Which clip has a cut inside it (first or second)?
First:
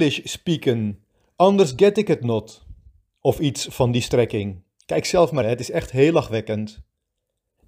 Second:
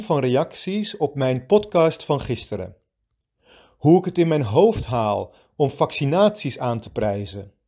first